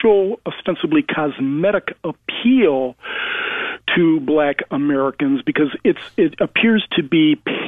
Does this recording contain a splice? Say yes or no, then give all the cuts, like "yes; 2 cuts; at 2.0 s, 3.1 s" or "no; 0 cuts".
no; 0 cuts